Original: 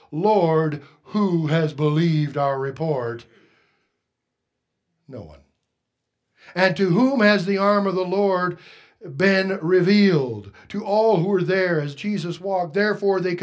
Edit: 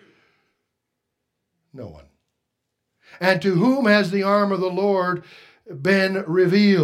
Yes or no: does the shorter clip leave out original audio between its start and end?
no